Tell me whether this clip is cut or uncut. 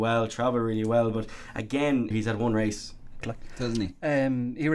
cut